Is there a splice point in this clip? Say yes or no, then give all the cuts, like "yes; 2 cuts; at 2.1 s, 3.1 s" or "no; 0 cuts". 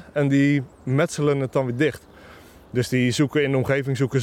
no; 0 cuts